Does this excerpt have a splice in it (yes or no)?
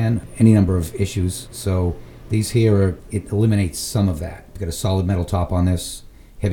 no